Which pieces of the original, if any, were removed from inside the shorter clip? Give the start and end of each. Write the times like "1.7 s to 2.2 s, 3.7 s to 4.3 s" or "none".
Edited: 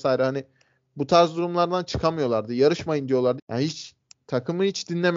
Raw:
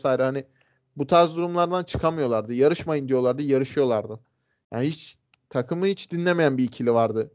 3.4 s to 4.6 s

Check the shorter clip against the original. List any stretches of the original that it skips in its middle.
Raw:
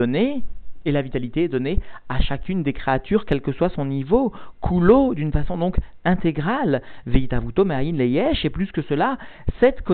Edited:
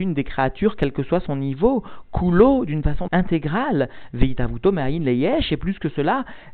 5.6 s to 6.0 s

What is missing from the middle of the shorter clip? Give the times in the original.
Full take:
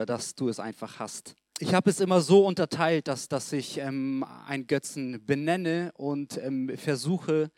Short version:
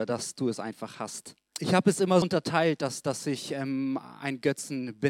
2.2 s to 2.5 s

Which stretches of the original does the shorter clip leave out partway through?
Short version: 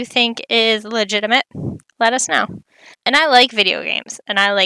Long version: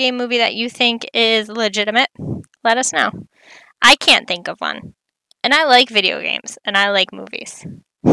3.6 s to 5.3 s

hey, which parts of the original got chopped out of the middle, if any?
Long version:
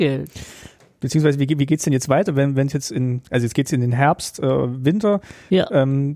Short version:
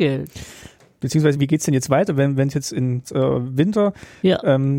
1.4 s to 1.6 s, 3.2 s to 4.3 s

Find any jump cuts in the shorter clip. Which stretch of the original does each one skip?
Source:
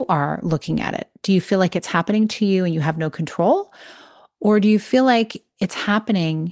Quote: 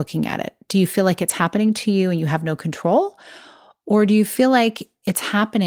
none

